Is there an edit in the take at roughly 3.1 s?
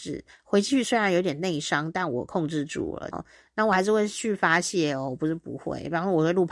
yes; 1 cut; at 3.1 s

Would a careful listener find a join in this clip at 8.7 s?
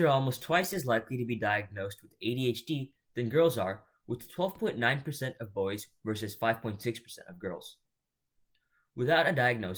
no; 0 cuts

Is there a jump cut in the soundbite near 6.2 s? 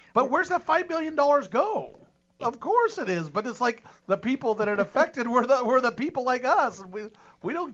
no; 1 cut; at 2.4 s

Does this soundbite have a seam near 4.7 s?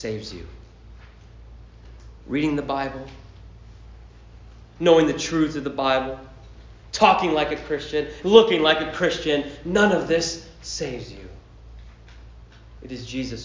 no; 1 cut; at 8.2 s

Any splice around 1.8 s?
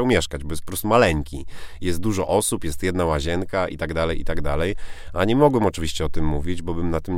no; 0 cuts

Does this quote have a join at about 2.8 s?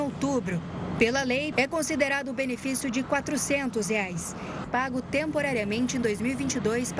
no; 2 cuts; at 1.5 s, 4.6 s

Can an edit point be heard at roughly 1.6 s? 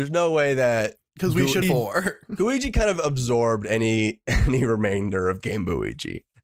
yes; 1 cut; at 1.6 s

